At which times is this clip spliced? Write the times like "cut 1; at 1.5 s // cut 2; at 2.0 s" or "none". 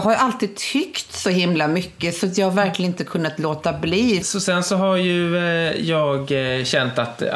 cut 1; at 4.2 s